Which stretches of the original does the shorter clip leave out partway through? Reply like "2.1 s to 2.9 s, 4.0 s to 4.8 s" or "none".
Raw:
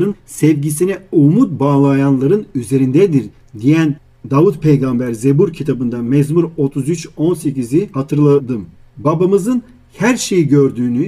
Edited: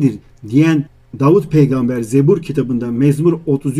none